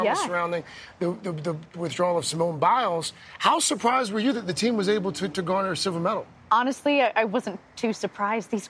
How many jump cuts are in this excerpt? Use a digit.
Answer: 1